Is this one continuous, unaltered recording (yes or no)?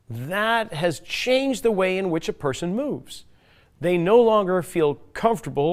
yes